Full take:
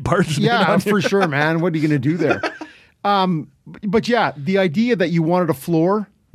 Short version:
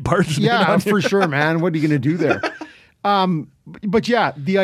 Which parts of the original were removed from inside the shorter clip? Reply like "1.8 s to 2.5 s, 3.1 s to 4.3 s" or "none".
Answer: none

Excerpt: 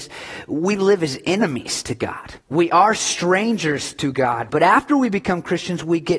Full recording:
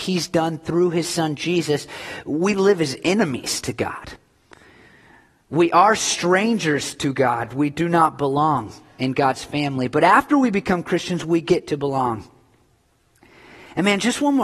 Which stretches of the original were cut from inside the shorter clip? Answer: 4.2 s to 5.4 s, 7.5 s to 9.9 s

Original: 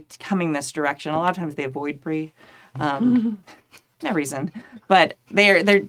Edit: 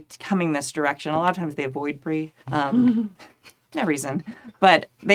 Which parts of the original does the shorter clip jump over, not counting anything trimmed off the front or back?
2.4 s to 2.7 s

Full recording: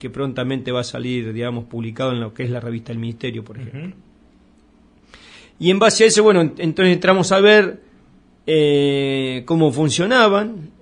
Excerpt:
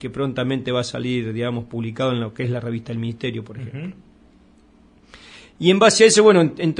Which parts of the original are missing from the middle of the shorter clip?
none

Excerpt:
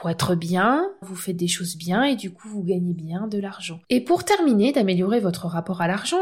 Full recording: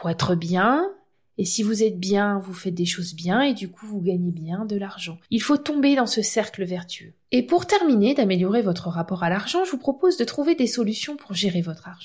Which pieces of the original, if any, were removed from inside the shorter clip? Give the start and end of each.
1.0 s to 2.4 s, 5.2 s to 7.3 s

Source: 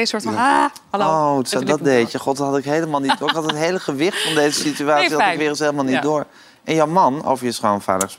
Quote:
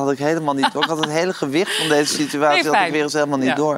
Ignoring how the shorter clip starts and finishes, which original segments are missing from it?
none

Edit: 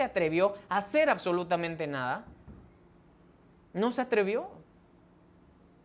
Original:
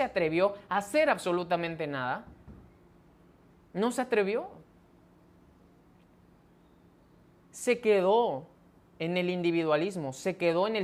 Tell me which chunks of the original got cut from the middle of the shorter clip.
none

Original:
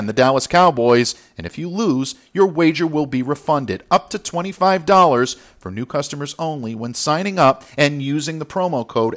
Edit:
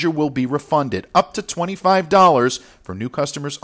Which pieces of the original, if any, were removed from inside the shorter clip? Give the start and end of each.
none

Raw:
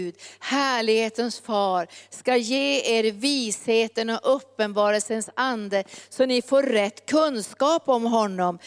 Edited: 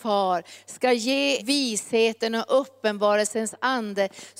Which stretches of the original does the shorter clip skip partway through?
2.8 s to 3.1 s

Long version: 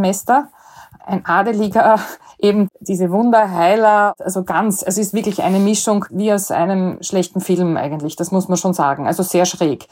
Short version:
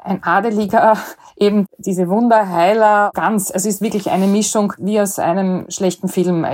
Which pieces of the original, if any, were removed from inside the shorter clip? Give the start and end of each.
4.2 s to 4.5 s

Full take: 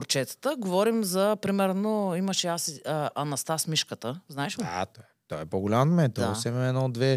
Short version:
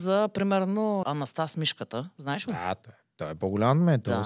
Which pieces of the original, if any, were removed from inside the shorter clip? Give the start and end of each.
2.1 s to 3.1 s

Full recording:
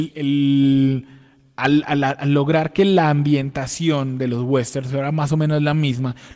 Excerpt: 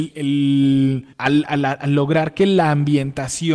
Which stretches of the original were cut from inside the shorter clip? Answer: 1.1 s to 1.5 s

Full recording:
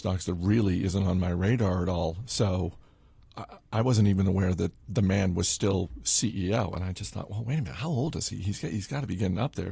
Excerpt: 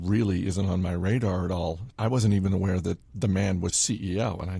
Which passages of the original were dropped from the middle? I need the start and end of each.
2.3 s to 3.6 s, 5.4 s to 6.0 s

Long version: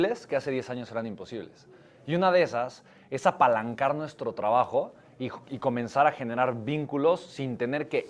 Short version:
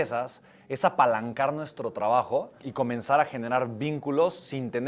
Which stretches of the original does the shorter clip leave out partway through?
5.0 s to 5.4 s

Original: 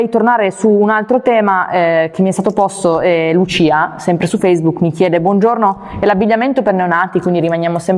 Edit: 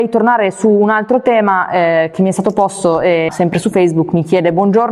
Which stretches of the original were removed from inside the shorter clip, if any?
3.3 s to 4.0 s

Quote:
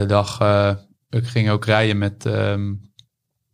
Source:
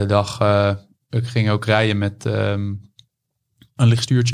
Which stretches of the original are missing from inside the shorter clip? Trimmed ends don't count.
none

